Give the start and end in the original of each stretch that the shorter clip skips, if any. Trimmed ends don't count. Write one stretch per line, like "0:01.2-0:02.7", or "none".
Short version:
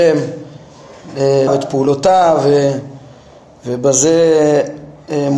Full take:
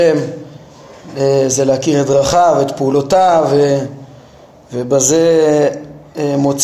0:01.5-0:02.5